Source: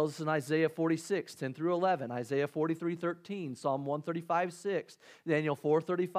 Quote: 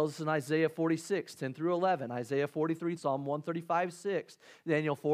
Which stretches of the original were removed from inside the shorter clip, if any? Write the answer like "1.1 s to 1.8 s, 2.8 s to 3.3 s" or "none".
3.0 s to 3.6 s